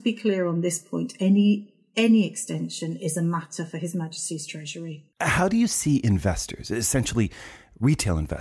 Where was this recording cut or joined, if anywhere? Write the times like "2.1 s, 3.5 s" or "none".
5.1 s